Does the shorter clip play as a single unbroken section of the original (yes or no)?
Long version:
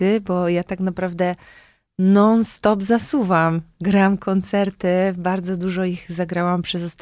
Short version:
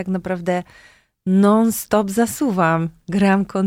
yes